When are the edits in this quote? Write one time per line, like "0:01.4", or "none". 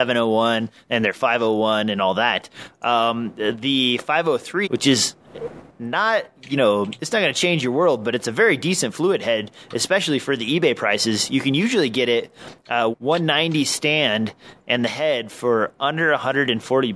0:04.6
0:12.9